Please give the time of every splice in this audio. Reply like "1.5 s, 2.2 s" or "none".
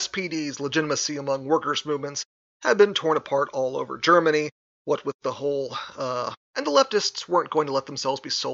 6.4 s